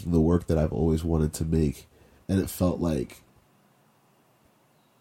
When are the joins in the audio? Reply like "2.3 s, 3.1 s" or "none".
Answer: 2.2 s